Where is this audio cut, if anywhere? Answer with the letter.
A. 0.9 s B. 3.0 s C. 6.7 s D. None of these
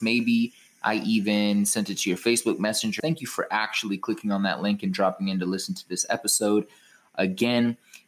B